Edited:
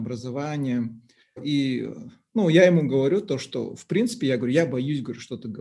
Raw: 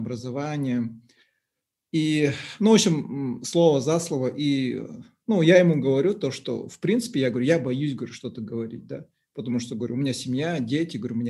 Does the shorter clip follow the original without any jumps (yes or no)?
no